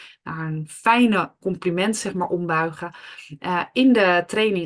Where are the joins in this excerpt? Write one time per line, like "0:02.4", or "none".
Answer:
0:01.4